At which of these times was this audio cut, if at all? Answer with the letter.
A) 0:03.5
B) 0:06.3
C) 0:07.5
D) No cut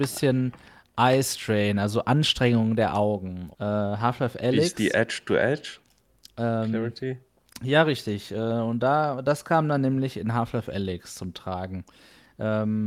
A